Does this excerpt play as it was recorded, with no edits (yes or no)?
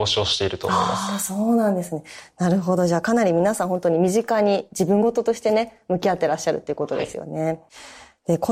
yes